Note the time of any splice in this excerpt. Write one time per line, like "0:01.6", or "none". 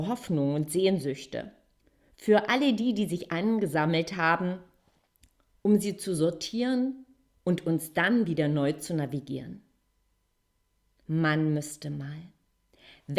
none